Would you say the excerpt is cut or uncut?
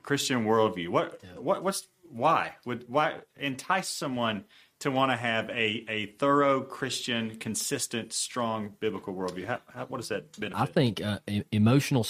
uncut